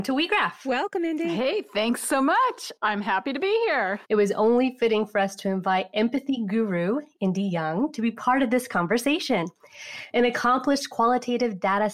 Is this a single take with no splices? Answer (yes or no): no